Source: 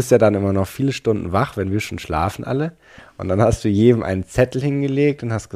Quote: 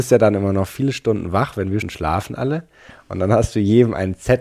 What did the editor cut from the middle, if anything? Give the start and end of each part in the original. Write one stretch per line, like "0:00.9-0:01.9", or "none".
0:01.8-0:01.9